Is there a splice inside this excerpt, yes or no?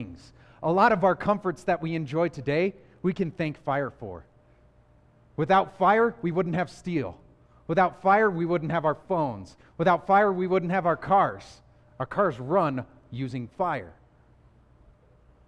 no